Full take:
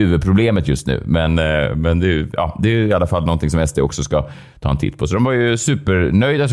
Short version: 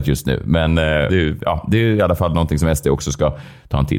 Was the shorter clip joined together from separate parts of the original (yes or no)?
yes